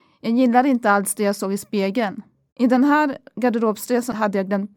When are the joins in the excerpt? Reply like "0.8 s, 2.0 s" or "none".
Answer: 2.5 s